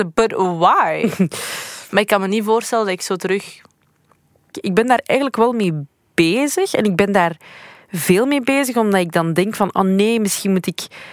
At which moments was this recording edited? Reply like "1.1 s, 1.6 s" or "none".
1.9 s, 4.5 s